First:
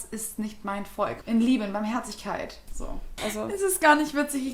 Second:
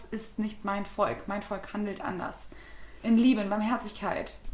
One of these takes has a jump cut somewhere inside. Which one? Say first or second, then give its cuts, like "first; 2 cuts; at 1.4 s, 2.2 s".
first; 2 cuts; at 1.2 s, 3.2 s